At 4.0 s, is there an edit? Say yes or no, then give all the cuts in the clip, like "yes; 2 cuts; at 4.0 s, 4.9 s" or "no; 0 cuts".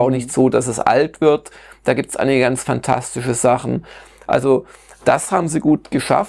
no; 0 cuts